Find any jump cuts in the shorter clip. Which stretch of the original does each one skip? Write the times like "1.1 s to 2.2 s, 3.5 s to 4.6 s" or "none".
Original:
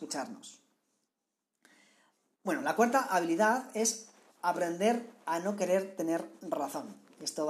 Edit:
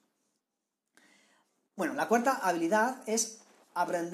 none